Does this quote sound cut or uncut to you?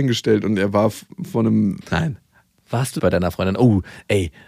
cut